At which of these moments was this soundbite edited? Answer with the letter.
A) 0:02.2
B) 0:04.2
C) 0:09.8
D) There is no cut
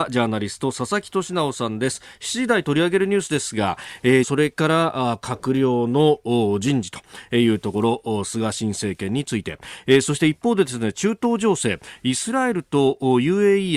B